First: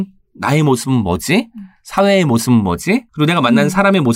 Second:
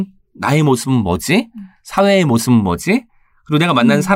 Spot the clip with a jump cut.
first; 1 cut; at 3.1 s

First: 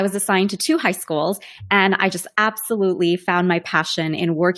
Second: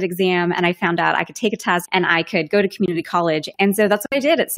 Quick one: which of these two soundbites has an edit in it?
second; 2 cuts; at 1.8 s, 3.5 s

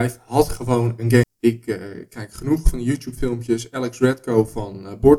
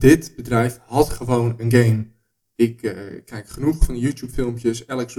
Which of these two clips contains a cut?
first; 1 cut; at 1.2 s

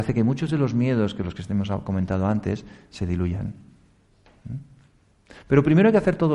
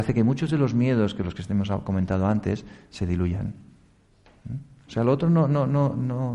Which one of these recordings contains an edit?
second; 1 cut; at 4.9 s

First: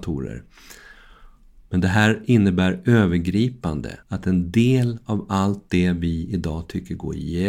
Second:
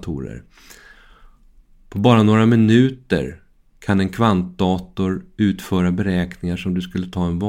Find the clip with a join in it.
first; 2 cuts; at 1.6 s, 4.0 s

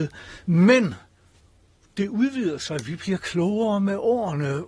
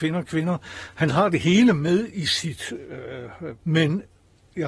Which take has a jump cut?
second; 1 cut; at 3.6 s

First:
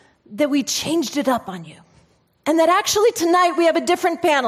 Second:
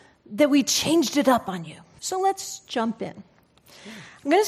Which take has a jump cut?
second; 1 cut; at 2.0 s

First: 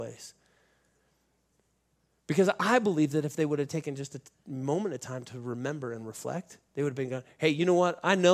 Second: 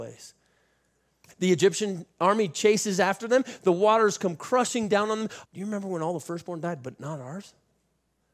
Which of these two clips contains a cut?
second; 2 cuts; at 1.2 s, 5.5 s

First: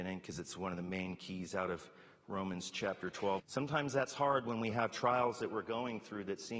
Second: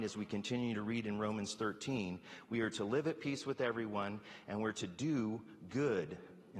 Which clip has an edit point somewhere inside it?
first; 1 cut; at 3.4 s

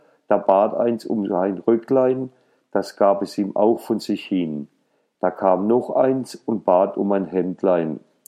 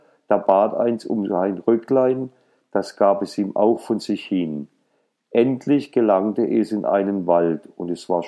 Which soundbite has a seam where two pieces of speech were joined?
first; 1 cut; at 5.1 s

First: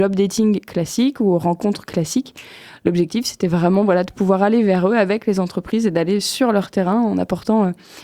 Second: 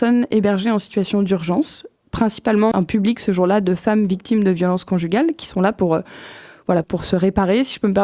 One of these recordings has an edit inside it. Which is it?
second; 2 cuts; at 2.7 s, 6.8 s

